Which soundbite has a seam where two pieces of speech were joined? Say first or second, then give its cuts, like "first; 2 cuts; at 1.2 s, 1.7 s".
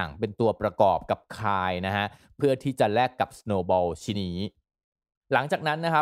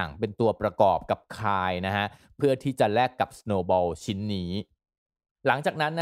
first; 1 cut; at 4.1 s